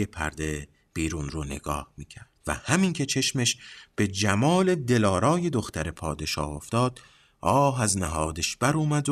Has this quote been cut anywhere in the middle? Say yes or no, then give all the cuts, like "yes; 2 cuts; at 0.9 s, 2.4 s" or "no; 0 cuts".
yes; 1 cut; at 2.4 s